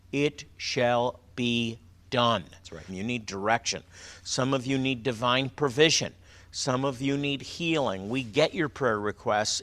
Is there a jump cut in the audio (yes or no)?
yes